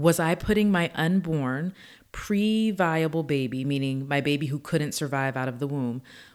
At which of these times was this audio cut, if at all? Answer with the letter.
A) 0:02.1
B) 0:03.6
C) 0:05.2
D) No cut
D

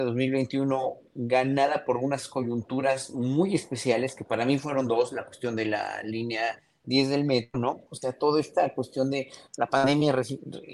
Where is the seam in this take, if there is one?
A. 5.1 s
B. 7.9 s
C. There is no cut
B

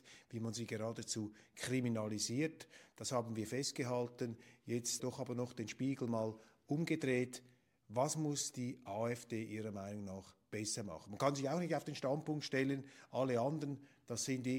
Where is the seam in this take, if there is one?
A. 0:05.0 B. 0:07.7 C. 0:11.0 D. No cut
A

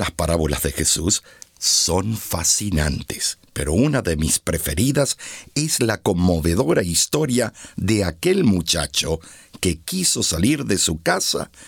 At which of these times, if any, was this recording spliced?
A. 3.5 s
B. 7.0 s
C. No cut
A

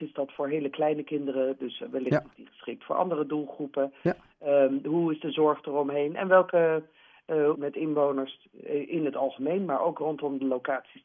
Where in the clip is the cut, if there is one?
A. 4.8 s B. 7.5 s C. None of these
B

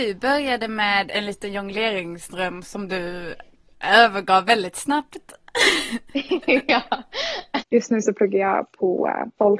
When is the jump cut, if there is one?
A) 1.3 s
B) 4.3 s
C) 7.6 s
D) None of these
C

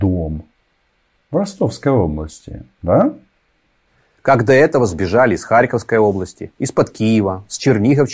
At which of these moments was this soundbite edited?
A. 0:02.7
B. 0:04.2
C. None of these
C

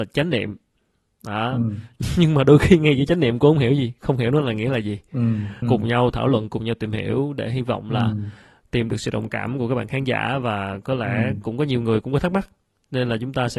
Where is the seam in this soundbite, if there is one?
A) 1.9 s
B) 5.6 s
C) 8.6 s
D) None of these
B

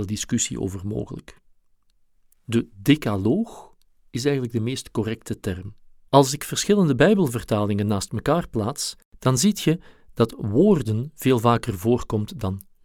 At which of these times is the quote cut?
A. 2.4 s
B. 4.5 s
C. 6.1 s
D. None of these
C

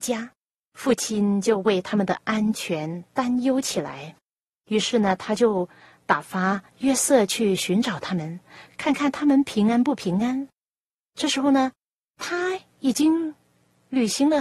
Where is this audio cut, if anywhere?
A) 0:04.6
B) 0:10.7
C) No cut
B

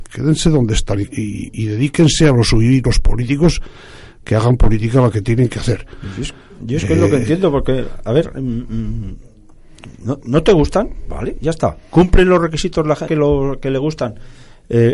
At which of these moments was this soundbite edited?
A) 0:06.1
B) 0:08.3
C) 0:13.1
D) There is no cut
C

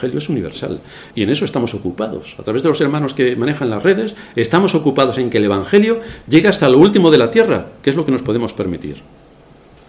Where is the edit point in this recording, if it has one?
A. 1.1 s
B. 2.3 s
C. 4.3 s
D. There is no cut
A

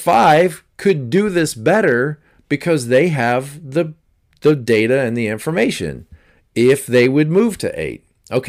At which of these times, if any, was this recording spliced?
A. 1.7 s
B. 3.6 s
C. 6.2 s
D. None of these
D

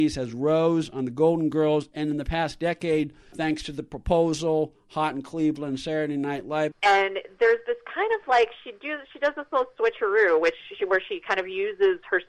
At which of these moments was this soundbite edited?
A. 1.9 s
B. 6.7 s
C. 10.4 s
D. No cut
B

